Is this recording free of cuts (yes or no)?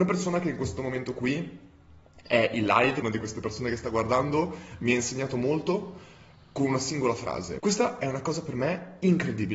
no